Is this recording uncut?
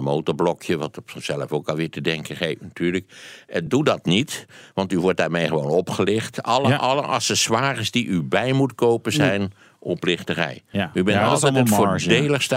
yes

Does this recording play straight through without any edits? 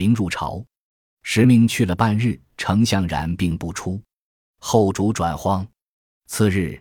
no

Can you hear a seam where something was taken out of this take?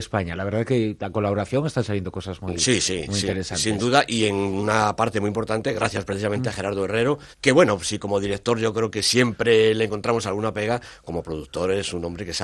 yes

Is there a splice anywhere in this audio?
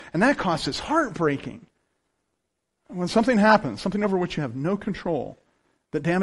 no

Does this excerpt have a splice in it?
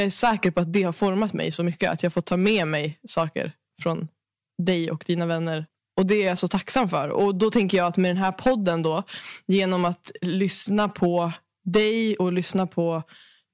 no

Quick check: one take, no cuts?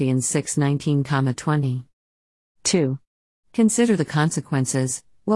yes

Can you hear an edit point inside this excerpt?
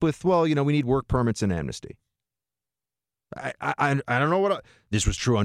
no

